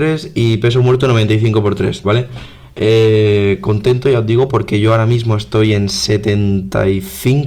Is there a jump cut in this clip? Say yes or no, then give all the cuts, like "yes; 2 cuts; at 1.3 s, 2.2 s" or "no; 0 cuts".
yes; 1 cut; at 2.0 s